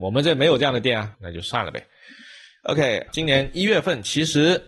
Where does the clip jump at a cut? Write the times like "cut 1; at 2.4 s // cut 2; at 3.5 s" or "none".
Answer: cut 1; at 3.1 s